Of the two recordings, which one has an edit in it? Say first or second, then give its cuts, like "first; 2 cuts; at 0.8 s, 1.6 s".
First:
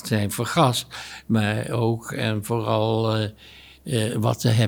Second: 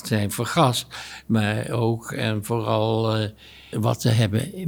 second; 1 cut; at 3.7 s